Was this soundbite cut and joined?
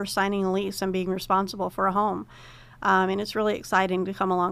no; 0 cuts

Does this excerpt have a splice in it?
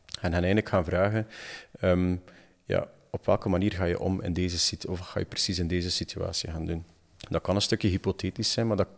no; 0 cuts

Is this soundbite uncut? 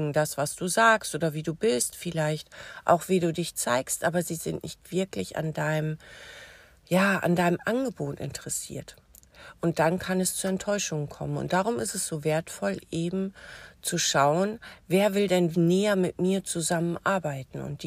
no; 1 cut; at 15.5 s

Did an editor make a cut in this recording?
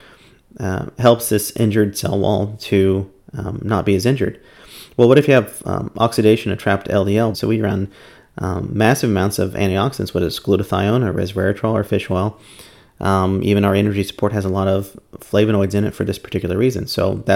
yes; 1 cut; at 7.3 s

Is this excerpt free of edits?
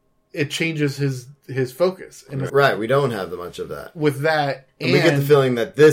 no; 1 cut; at 2.5 s

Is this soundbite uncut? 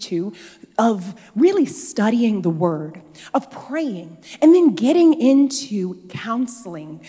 yes; 0 cuts

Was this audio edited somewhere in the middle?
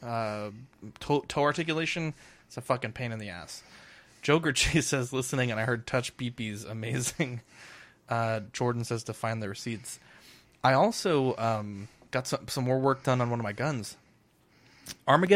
no; 0 cuts

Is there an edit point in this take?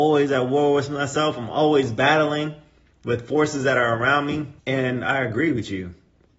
yes; 1 cut; at 4.6 s

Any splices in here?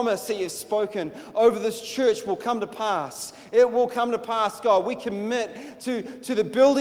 no; 0 cuts

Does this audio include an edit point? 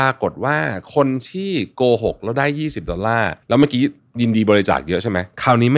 yes; 1 cut; at 3.4 s

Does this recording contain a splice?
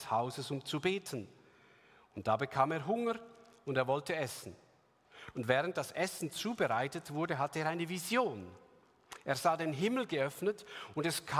no; 0 cuts

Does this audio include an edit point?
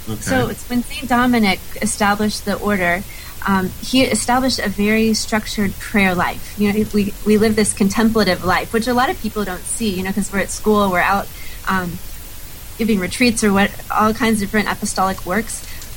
no; 0 cuts

